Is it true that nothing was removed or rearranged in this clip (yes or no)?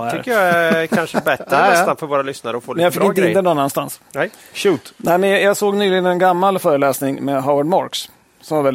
yes